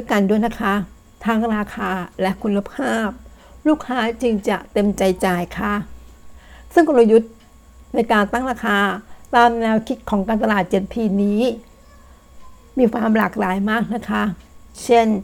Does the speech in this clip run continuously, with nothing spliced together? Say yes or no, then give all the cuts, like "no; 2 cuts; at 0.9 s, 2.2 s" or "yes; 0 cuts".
yes; 0 cuts